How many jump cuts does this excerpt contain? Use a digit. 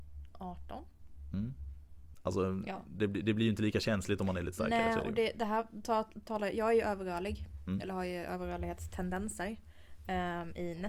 1